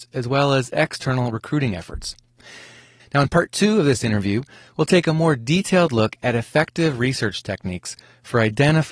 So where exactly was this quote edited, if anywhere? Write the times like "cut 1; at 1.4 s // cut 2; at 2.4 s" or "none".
cut 1; at 3.0 s